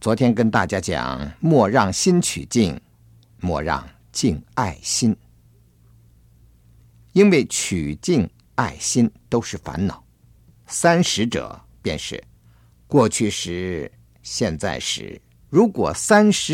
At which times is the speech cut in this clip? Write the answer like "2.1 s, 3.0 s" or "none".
10.6 s, 15.3 s